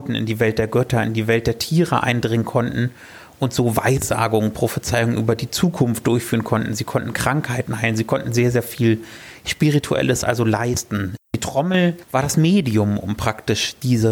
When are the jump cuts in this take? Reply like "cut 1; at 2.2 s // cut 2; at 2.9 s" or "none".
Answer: none